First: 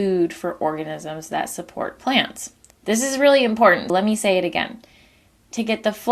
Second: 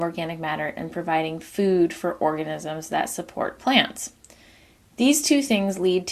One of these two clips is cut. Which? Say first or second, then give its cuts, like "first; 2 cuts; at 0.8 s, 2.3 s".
first; 2 cuts; at 2.7 s, 3.9 s